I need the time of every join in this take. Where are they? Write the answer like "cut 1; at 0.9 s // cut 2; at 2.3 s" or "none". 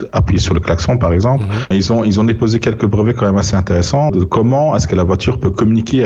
cut 1; at 1.7 s // cut 2; at 4.1 s